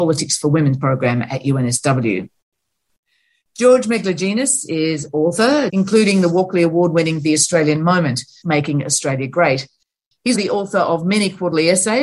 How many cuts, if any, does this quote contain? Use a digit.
3